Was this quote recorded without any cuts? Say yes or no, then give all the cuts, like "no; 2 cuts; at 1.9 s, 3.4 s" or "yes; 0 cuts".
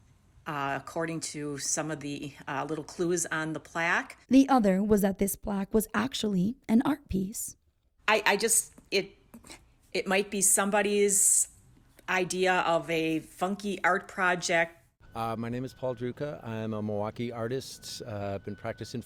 no; 2 cuts; at 4.2 s, 15.0 s